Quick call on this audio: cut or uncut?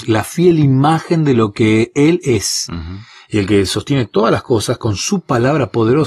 uncut